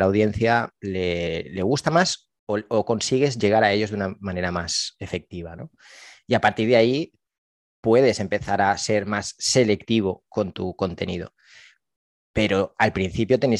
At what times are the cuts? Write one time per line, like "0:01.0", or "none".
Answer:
none